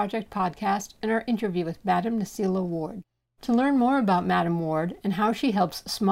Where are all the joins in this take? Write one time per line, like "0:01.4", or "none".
none